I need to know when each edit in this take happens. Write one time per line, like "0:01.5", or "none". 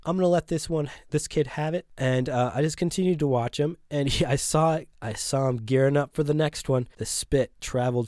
none

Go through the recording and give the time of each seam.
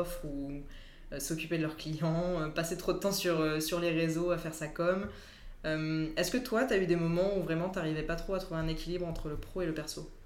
none

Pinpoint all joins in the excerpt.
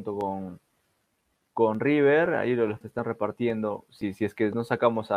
0:02.8

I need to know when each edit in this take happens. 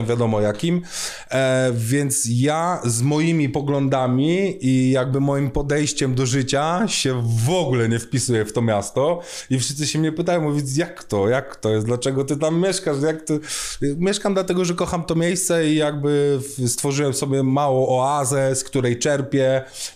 none

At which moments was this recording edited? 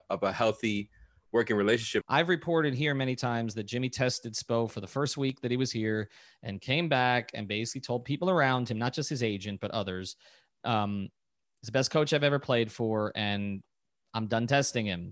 0:02.0

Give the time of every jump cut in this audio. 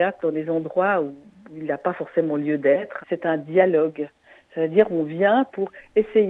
0:03.0

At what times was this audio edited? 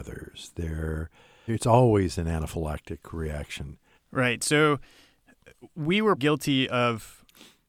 0:01.5
0:04.0
0:06.2

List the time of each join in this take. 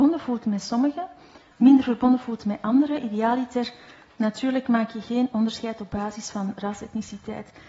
none

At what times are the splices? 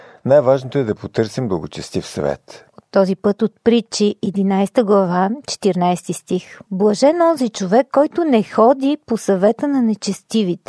0:02.7
0:06.7

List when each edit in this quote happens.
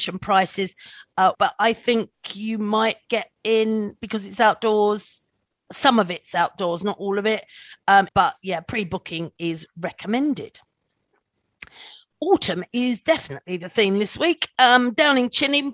0:01.3
0:08.1

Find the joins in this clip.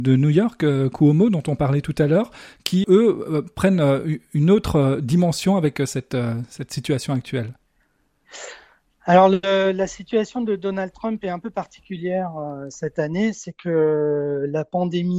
0:02.8

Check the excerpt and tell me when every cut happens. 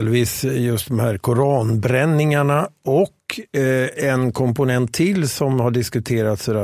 none

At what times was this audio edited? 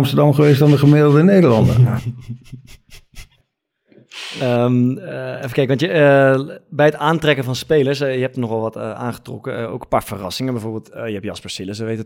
none

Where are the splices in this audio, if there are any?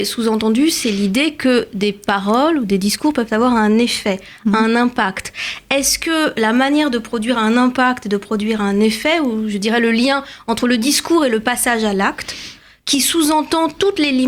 none

